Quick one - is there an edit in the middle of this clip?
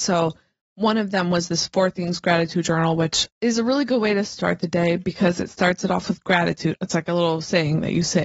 yes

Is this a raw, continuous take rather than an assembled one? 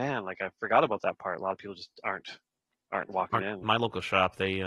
no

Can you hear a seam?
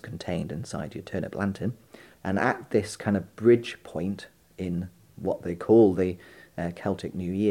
yes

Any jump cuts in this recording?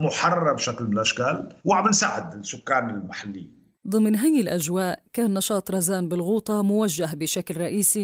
yes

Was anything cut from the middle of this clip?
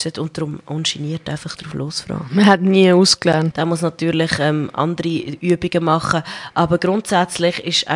yes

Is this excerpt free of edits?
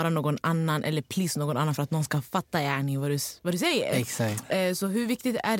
yes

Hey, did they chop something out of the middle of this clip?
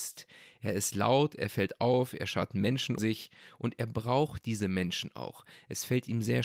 yes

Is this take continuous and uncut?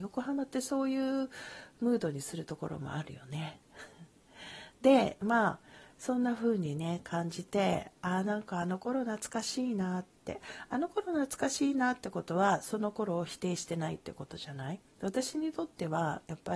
no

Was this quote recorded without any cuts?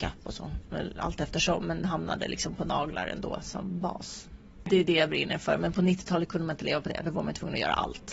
yes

